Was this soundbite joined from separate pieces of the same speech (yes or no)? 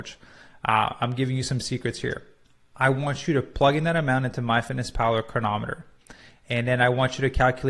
no